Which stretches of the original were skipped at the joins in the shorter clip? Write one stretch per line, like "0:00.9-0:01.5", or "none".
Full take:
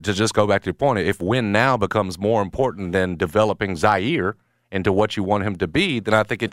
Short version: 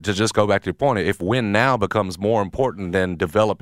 none